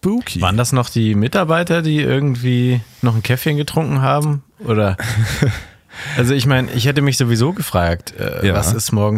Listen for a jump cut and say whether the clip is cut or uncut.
uncut